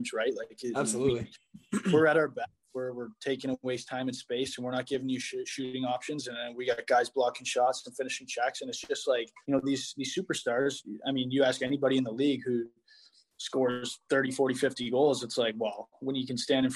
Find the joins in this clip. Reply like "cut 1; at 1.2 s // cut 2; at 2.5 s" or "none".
cut 1; at 9.4 s